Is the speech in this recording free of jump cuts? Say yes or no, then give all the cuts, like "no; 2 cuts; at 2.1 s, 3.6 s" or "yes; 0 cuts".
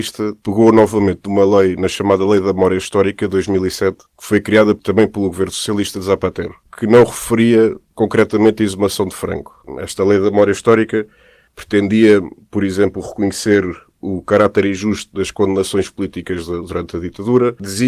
yes; 0 cuts